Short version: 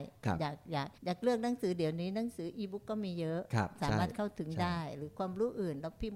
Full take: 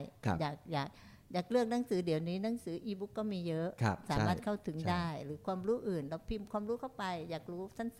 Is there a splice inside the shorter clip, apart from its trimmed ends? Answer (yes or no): yes